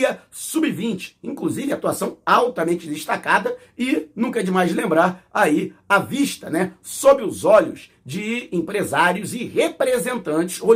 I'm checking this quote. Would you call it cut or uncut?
uncut